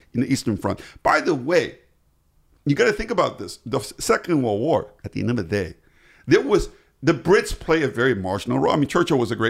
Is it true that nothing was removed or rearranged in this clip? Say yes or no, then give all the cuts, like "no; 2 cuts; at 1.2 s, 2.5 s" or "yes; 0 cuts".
no; 1 cut; at 5.0 s